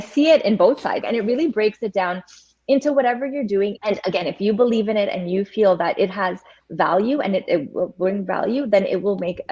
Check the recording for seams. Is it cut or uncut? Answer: cut